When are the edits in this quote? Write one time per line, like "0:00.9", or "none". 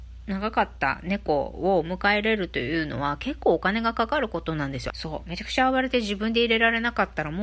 0:04.9